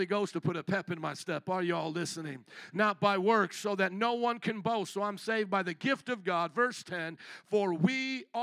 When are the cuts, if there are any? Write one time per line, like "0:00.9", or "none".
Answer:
none